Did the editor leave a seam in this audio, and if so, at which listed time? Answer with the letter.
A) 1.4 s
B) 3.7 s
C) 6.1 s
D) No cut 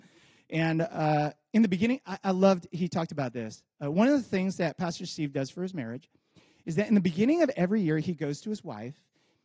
D